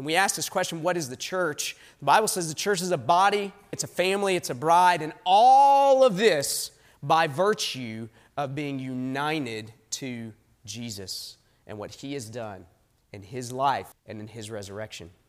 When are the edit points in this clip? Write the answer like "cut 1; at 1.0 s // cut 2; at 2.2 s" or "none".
cut 1; at 3.7 s // cut 2; at 13.9 s